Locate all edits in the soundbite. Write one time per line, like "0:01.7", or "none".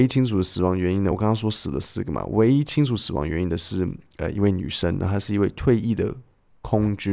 none

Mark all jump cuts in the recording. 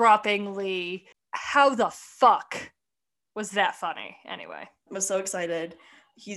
0:04.9

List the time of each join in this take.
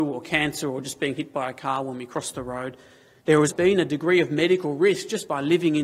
0:03.5

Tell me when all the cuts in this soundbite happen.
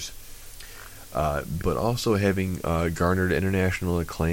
0:01.6

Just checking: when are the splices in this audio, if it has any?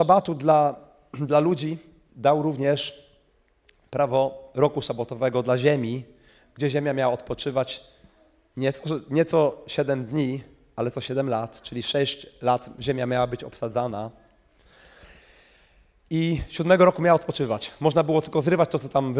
none

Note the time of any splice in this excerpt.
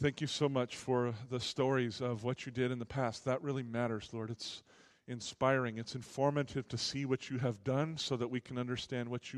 none

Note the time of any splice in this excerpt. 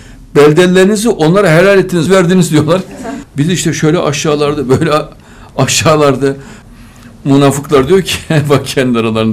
0:02.1
0:03.2

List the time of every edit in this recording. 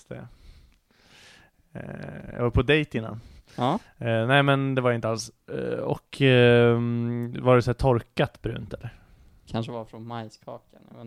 none

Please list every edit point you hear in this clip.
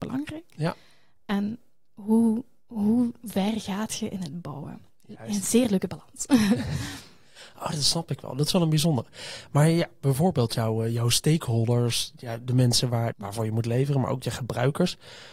0:13.1

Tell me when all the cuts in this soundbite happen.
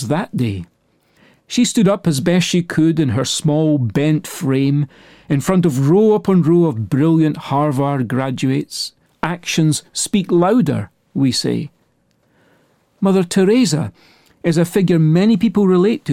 0:09.1

